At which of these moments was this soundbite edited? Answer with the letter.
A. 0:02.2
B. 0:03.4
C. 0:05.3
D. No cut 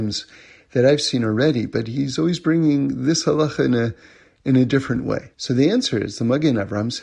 C